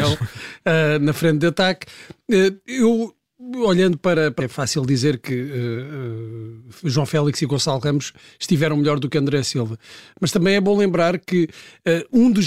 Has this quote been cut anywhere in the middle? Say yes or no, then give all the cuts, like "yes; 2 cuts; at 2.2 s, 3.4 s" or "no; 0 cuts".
yes; 1 cut; at 4.4 s